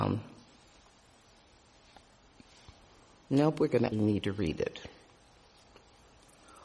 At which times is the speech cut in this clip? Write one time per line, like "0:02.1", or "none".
0:03.9